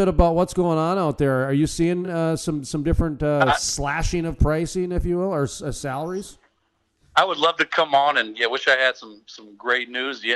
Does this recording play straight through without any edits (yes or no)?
yes